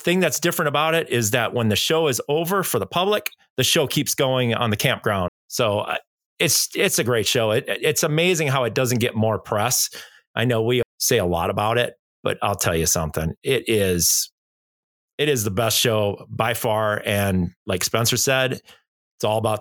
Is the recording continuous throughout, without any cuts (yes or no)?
no